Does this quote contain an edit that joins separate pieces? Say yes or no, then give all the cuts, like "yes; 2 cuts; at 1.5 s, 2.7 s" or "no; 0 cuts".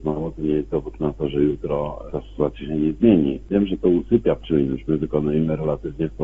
no; 0 cuts